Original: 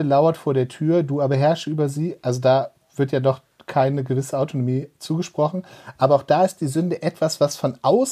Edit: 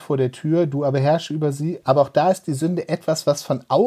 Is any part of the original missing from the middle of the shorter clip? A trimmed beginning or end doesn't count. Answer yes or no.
yes